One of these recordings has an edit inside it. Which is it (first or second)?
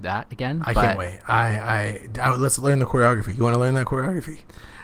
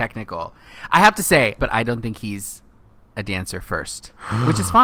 second